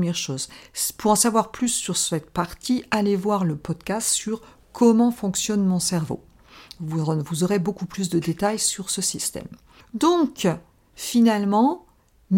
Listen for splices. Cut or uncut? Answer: uncut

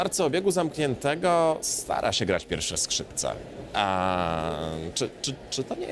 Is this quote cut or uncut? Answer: uncut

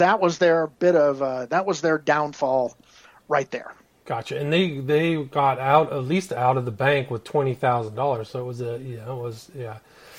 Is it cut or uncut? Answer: uncut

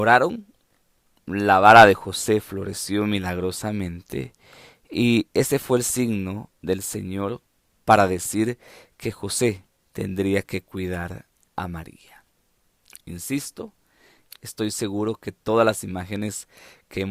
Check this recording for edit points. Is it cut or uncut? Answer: cut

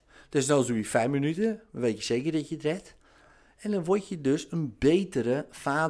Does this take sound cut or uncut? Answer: uncut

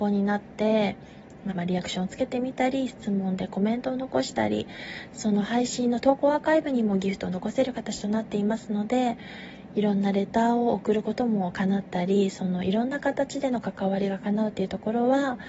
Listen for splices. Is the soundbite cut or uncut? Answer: cut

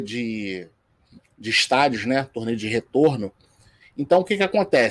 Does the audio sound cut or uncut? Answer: cut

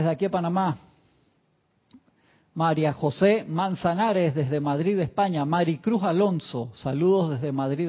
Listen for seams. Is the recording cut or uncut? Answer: uncut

